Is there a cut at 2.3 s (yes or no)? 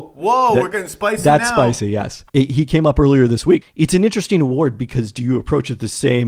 yes